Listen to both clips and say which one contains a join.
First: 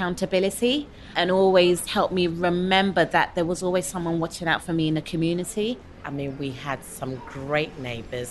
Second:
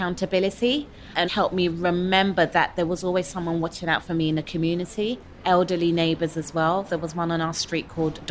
second; 2 cuts; at 1.3 s, 5.4 s

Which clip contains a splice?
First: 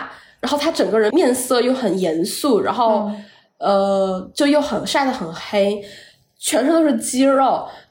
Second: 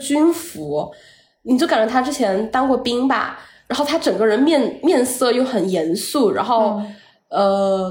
first; 1 cut; at 1.1 s

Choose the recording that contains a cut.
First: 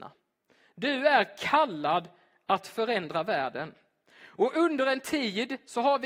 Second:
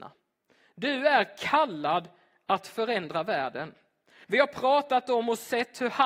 second; 1 cut; at 4.2 s

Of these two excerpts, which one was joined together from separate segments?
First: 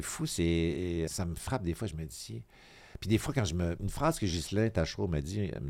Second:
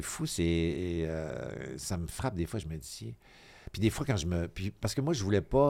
first; 2 cuts; at 1.1 s, 3.8 s

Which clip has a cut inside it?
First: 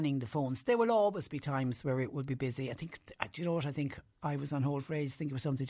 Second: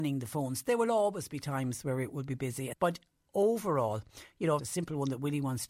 second; 2 cuts; at 2.7 s, 4.6 s

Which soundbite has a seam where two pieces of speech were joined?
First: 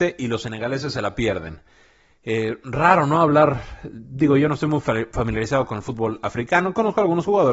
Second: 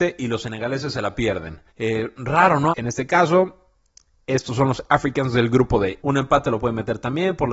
second; 3 cuts; at 1.7 s, 2.7 s, 6.0 s

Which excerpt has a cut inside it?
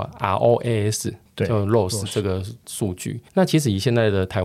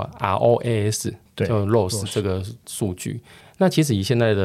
first; 1 cut; at 3.3 s

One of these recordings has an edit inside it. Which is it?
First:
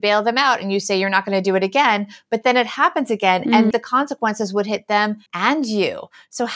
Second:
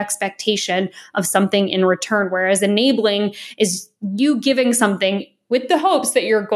first; 2 cuts; at 3.7 s, 5.3 s

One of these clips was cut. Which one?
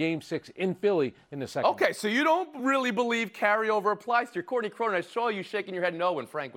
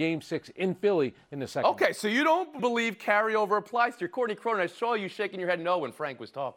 second; 1 cut; at 2.6 s

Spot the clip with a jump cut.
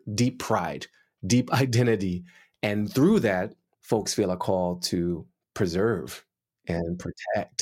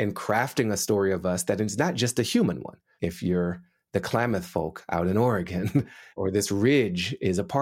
second; 2 cuts; at 3.0 s, 6.2 s

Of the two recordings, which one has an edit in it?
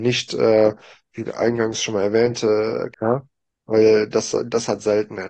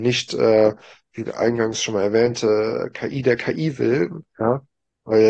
first; 1 cut; at 2.9 s

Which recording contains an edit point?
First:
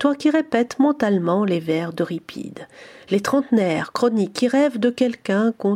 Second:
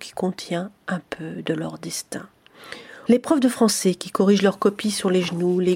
second; 1 cut; at 3.1 s

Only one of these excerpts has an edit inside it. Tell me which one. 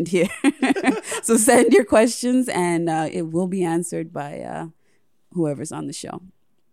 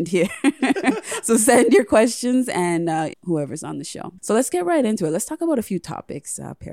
second; 2 cuts; at 3.1 s, 4.2 s

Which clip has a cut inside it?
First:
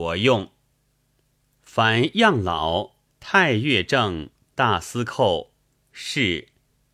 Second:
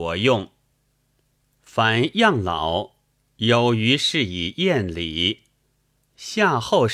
first; 1 cut; at 3.1 s

